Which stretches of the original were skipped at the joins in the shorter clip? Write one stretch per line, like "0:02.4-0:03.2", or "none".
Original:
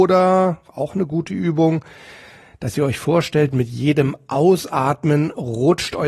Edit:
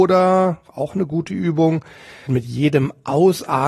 0:02.3-0:03.5